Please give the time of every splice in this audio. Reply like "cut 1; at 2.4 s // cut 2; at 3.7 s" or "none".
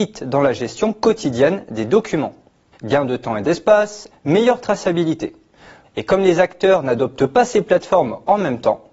cut 1; at 2.7 s // cut 2; at 4.1 s // cut 3; at 5.8 s